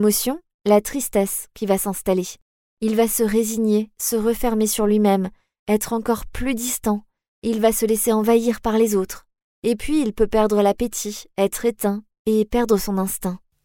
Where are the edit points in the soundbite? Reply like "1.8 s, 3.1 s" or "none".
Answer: none